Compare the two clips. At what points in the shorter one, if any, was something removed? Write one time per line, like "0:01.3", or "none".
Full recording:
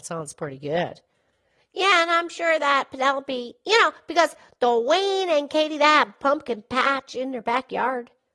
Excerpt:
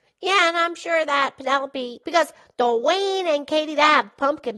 0:02.0